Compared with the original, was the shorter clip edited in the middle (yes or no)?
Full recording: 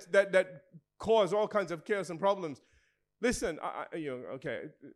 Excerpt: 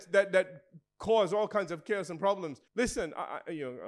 yes